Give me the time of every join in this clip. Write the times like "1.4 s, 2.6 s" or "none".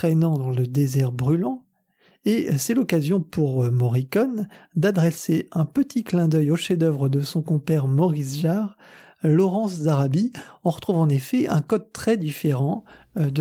none